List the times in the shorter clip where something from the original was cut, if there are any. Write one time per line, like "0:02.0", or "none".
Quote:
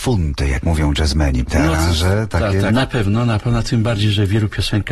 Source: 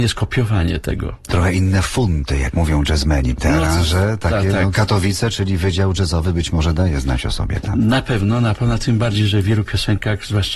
0:02.7